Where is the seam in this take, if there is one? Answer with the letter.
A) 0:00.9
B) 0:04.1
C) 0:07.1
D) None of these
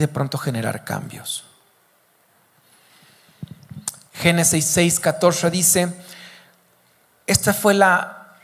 B